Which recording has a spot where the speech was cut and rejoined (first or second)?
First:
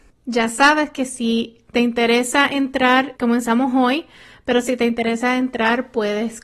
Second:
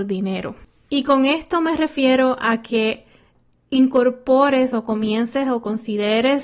first